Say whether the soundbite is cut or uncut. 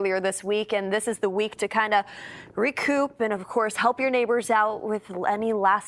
uncut